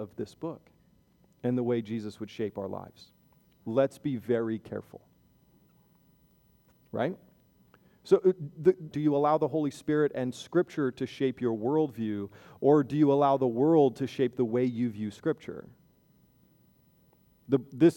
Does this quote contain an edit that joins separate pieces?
yes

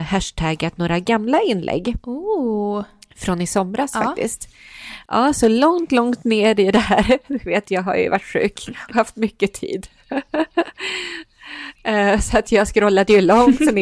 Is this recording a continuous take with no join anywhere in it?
yes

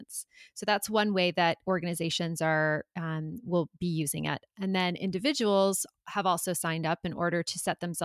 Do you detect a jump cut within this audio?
no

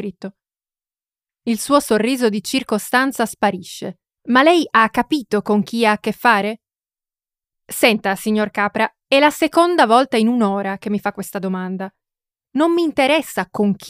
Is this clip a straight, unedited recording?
no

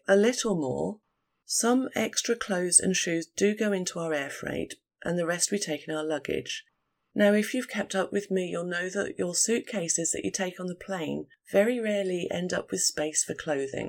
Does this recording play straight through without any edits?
yes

